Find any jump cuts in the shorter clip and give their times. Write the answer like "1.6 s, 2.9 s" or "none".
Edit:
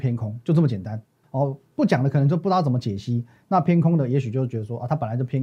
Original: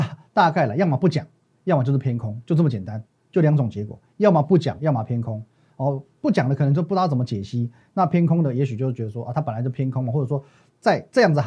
1.2 s